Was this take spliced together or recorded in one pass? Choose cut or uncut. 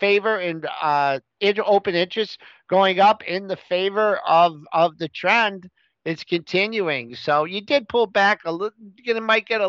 uncut